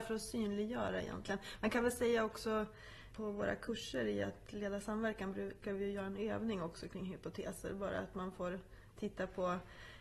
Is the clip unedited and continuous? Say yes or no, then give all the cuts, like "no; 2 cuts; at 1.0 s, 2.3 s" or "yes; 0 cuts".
no; 1 cut; at 3.1 s